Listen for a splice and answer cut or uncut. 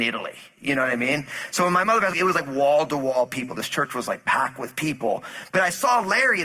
uncut